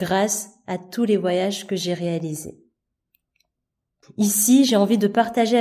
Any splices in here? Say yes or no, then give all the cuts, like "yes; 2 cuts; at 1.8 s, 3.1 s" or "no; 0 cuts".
yes; 1 cut; at 4.0 s